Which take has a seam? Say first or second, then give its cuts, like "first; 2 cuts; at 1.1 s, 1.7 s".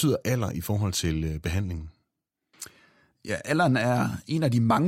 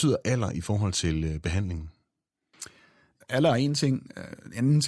second; 1 cut; at 3.2 s